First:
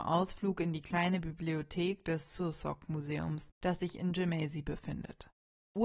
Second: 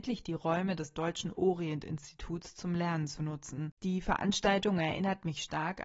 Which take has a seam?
second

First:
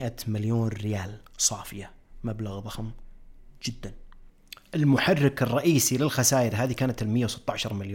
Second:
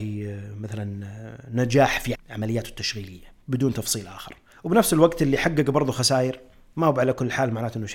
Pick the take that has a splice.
second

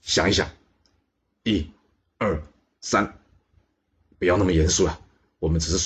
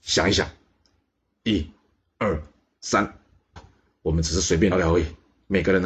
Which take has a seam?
second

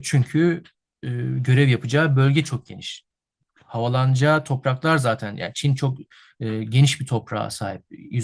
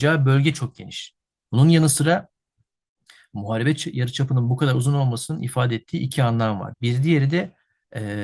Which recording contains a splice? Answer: second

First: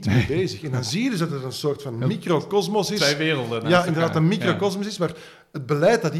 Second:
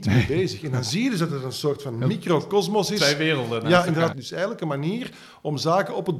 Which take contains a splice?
second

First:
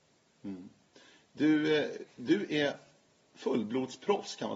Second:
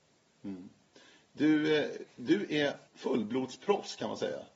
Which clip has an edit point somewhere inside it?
second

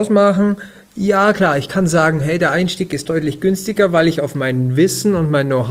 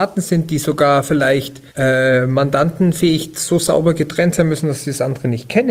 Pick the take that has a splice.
second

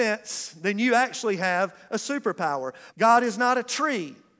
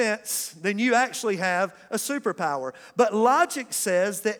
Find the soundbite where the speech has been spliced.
first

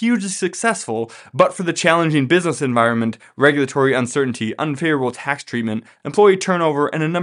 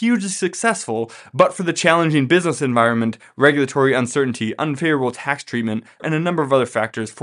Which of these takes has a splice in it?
second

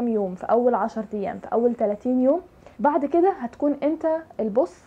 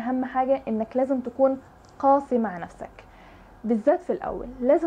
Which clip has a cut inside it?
first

